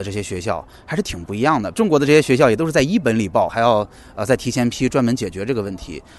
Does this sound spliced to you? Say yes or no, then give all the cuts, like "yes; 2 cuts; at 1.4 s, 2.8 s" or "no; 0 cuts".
yes; 2 cuts; at 1.7 s, 3.5 s